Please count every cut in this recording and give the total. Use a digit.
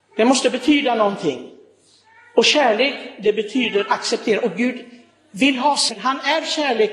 1